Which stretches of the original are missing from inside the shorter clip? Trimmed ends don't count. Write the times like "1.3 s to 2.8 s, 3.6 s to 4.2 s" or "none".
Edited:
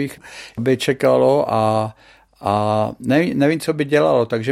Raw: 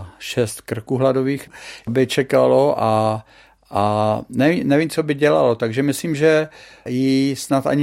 none

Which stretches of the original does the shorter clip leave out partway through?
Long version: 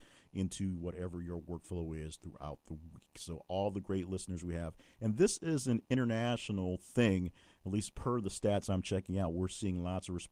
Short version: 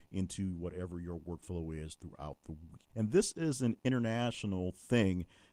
3.1 s to 4.9 s

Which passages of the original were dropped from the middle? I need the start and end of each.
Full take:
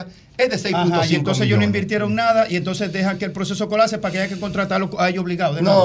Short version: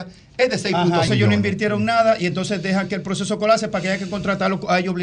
1.1 s to 1.4 s

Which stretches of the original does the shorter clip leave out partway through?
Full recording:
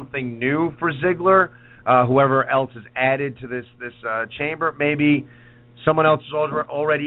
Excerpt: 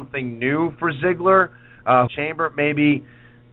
2.1 s to 4.3 s

